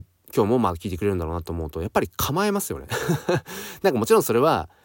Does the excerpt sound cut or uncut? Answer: uncut